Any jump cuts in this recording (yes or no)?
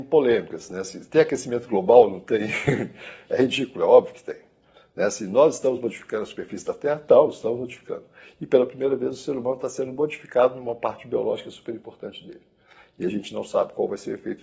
no